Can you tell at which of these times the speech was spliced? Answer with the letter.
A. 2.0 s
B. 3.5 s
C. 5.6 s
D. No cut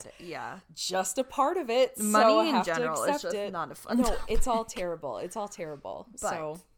D